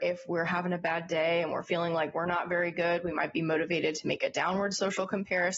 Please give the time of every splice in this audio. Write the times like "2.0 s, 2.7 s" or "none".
none